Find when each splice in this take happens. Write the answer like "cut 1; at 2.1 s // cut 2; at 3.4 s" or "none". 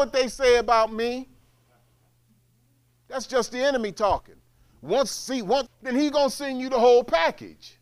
cut 1; at 5.7 s